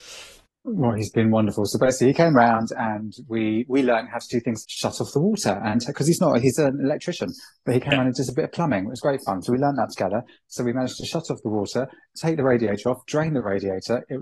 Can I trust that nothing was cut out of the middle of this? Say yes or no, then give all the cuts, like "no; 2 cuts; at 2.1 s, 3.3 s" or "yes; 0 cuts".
no; 1 cut; at 4.6 s